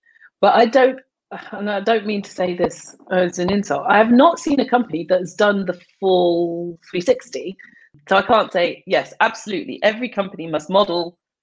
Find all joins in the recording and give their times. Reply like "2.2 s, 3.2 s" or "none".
none